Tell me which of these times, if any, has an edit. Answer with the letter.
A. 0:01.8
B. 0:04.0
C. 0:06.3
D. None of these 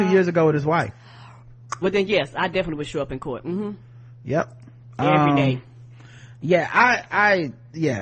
A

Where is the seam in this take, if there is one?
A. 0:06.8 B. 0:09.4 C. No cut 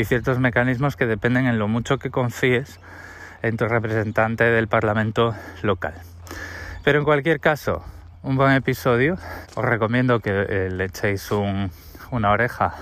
B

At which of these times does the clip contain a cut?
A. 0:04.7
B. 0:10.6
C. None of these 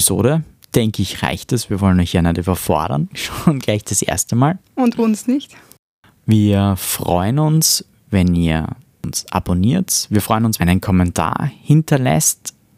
B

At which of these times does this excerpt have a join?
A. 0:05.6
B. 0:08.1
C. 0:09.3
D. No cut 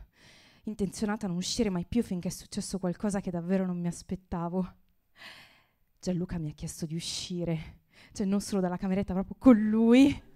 D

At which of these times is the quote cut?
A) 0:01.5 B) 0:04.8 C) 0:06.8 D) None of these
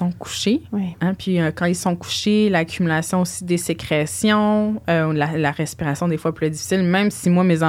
D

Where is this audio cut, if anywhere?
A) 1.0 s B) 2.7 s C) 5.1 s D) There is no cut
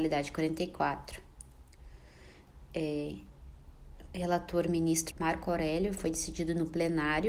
C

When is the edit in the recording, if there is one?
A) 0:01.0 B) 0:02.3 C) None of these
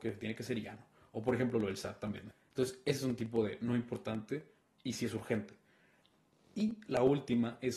B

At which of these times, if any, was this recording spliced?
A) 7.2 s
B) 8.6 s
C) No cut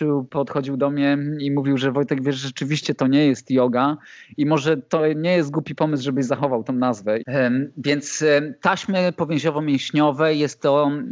A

